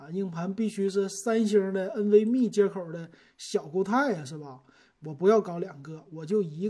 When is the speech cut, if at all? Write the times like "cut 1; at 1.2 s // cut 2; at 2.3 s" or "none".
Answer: none